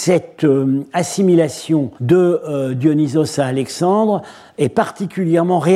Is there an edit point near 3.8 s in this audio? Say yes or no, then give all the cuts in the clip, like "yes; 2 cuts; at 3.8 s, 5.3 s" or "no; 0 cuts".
no; 1 cut; at 2.0 s